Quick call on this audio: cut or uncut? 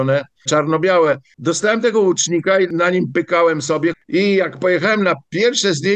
uncut